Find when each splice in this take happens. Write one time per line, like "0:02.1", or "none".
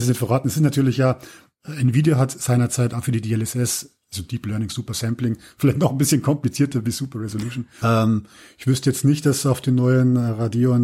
0:07.8